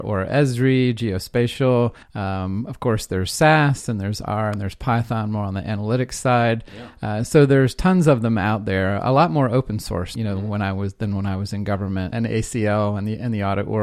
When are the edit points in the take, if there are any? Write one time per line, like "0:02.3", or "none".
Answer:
0:02.0
0:10.2
0:12.1